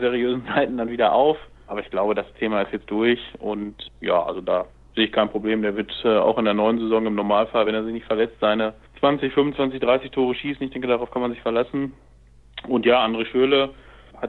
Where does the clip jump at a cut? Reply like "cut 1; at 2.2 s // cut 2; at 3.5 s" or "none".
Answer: none